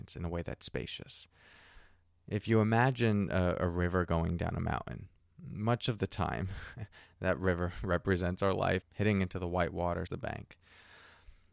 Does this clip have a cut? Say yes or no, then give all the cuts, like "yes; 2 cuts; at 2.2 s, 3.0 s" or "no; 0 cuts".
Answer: yes; 2 cuts; at 8.8 s, 10.1 s